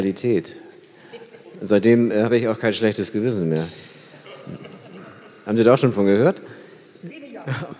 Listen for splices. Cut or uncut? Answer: uncut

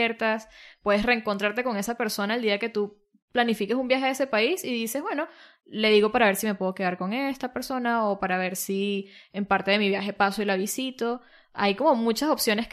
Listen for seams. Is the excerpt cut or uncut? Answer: uncut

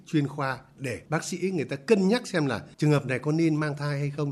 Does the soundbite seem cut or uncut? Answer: cut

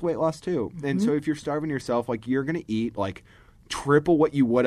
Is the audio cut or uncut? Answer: uncut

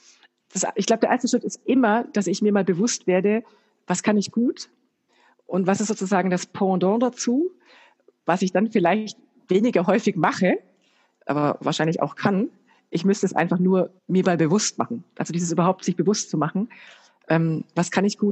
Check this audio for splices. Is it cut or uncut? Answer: cut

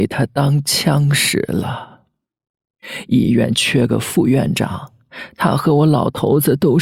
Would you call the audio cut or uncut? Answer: uncut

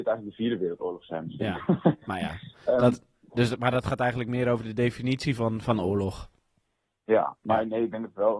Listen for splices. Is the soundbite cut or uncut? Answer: uncut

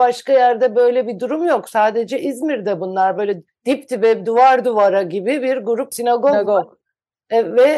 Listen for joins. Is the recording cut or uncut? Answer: uncut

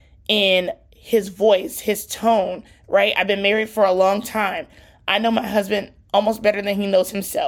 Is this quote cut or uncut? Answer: uncut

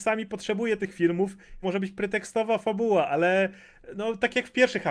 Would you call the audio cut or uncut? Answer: cut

